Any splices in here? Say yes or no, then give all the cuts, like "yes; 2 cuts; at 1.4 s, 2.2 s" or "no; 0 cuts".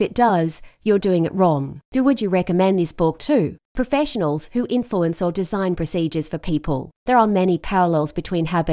yes; 2 cuts; at 1.8 s, 6.9 s